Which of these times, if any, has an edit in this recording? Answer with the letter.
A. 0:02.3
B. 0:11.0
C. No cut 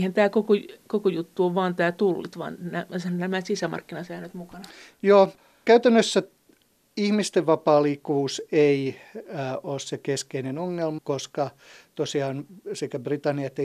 B